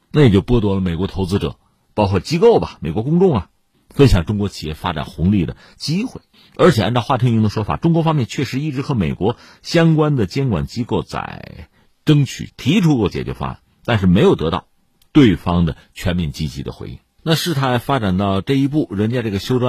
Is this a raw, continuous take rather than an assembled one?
no; 2 cuts; at 12.5 s, 17.2 s

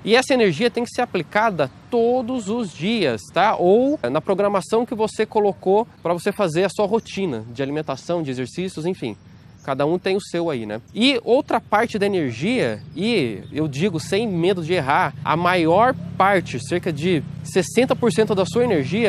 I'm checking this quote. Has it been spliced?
no; 0 cuts

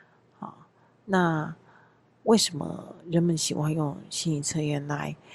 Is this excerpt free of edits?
yes; 0 cuts

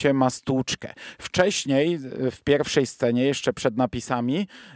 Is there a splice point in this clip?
no; 0 cuts

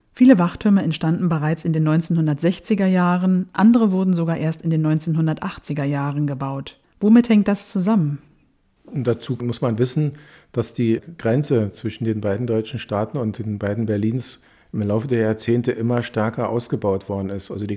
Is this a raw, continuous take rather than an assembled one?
yes; 0 cuts

